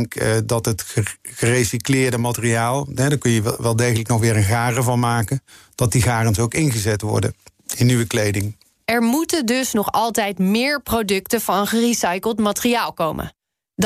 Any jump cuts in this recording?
no; 0 cuts

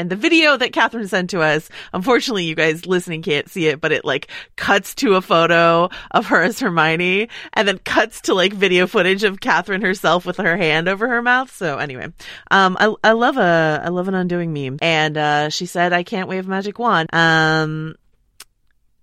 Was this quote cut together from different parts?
yes; 2 cuts; at 14.8 s, 17.1 s

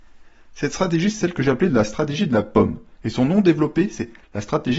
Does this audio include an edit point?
no; 0 cuts

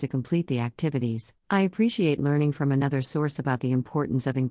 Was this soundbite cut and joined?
yes; 1 cut; at 1.4 s

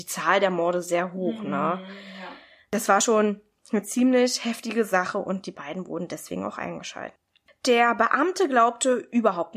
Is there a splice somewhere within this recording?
no; 0 cuts

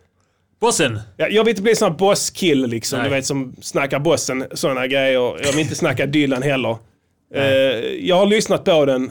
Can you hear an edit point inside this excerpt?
no; 0 cuts

